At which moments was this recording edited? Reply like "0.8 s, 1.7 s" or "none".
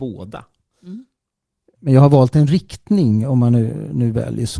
1.6 s